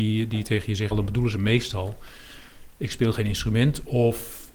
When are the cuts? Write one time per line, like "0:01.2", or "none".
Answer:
0:00.9